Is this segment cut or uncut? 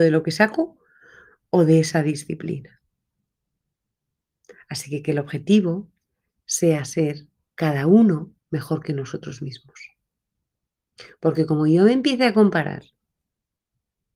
cut